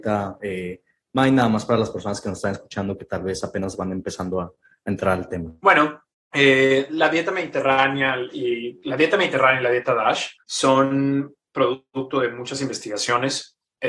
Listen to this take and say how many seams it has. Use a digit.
2